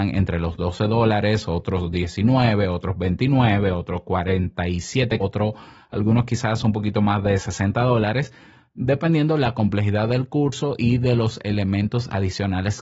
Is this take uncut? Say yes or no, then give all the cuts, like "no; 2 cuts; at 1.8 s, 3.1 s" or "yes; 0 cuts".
no; 1 cut; at 5.2 s